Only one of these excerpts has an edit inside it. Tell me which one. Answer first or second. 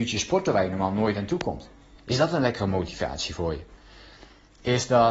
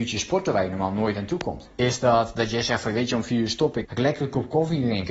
second